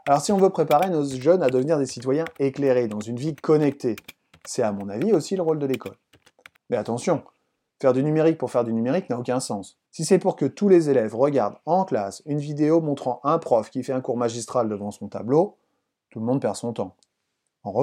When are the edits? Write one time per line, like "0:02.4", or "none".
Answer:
0:06.6
0:09.9